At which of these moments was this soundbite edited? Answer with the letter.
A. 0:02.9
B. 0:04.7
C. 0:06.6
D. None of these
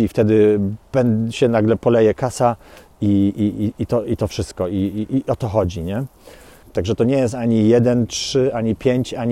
C